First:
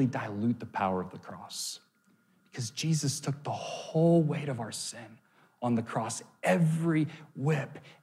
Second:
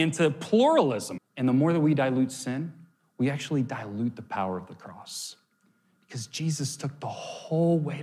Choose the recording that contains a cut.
second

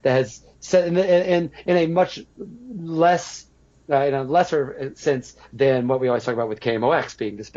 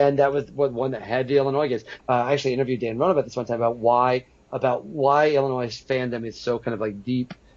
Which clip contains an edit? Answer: second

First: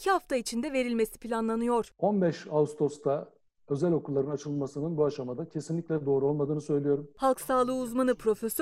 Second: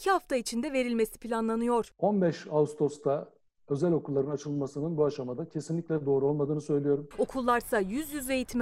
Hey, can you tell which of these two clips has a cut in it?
second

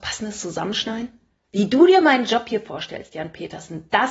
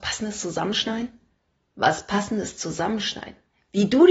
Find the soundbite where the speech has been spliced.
first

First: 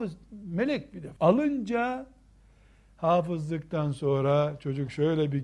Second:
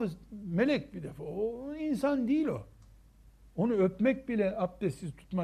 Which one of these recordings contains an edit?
first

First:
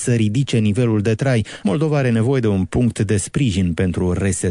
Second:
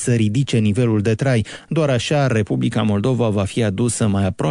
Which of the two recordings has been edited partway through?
first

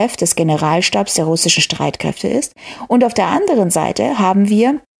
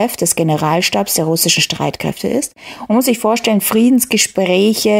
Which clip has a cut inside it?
second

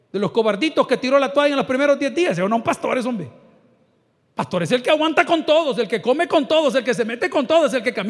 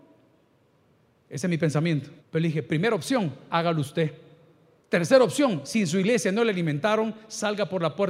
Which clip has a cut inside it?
second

